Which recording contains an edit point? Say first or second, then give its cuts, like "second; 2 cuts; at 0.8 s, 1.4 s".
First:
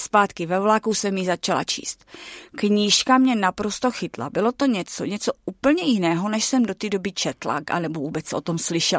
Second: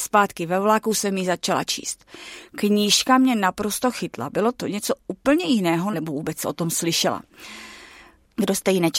second; 2 cuts; at 4.6 s, 5.9 s